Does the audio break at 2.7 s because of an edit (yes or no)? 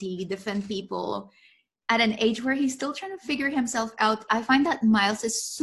no